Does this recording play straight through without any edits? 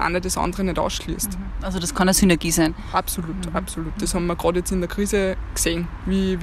yes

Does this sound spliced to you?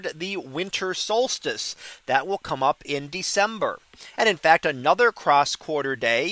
yes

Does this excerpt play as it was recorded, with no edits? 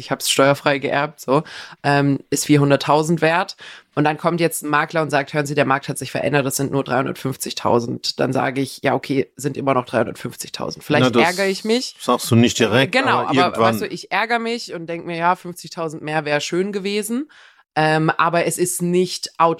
yes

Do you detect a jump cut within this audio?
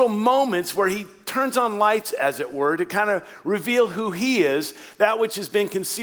no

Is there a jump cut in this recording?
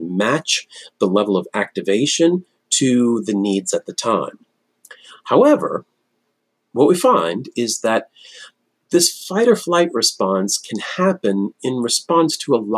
no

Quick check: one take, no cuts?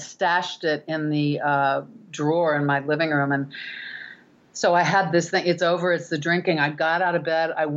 yes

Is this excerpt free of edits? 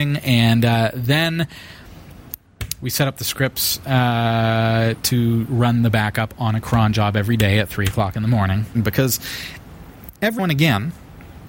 no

